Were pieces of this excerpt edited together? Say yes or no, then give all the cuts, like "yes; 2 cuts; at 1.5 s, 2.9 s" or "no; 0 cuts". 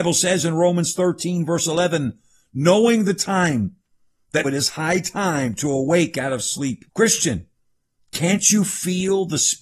yes; 2 cuts; at 4.4 s, 6.9 s